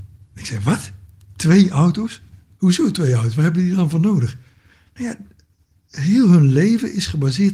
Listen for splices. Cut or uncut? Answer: uncut